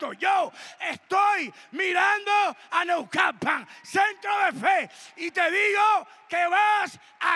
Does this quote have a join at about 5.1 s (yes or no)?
no